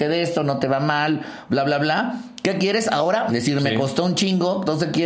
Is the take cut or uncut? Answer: cut